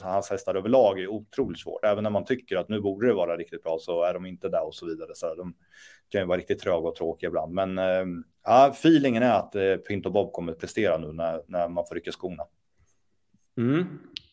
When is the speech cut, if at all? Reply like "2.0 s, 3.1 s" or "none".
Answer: none